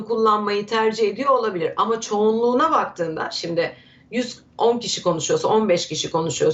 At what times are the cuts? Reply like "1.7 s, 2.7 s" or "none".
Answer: none

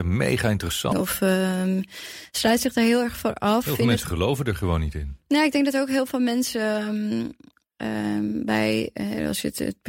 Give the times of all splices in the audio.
0.9 s

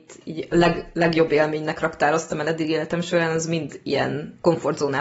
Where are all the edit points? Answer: none

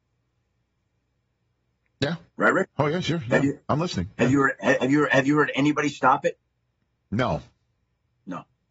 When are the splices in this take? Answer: none

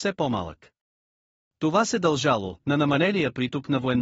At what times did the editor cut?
2.6 s

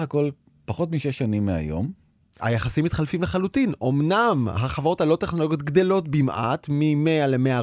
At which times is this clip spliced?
none

